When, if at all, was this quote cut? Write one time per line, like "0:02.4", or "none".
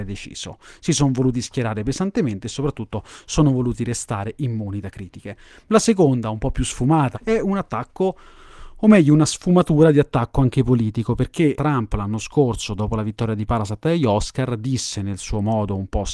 0:07.1
0:11.6